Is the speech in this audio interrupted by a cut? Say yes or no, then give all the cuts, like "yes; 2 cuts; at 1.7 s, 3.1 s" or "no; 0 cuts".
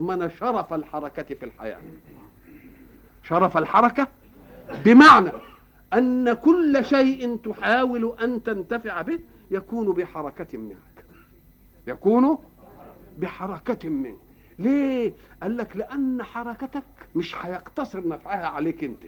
yes; 1 cut; at 17.1 s